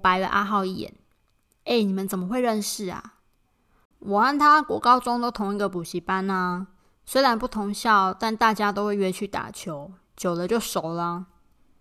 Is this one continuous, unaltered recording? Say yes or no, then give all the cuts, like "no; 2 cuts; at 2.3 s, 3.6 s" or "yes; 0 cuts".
yes; 0 cuts